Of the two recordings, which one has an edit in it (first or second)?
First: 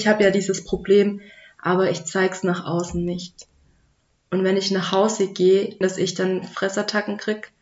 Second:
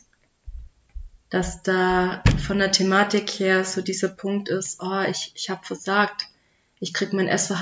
first